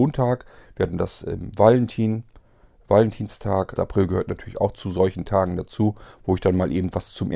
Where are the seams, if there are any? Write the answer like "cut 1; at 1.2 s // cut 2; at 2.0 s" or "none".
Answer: cut 1; at 3.8 s